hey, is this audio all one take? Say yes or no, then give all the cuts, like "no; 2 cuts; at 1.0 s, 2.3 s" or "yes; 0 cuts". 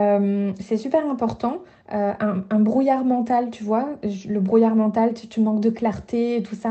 no; 1 cut; at 1.8 s